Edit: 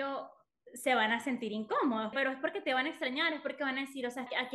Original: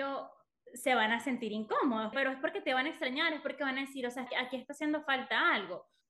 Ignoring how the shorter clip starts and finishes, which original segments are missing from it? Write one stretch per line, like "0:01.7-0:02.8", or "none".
none